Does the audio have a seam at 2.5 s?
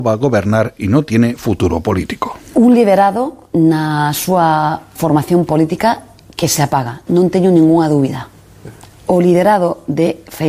no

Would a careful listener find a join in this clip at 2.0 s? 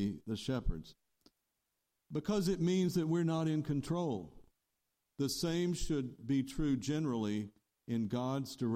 no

